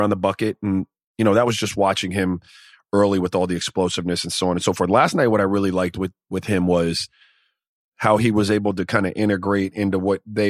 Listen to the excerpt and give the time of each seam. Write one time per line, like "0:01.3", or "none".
none